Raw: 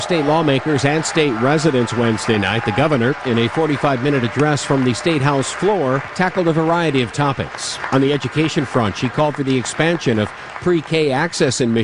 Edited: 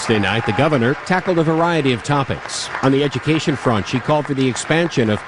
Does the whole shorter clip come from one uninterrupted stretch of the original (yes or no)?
no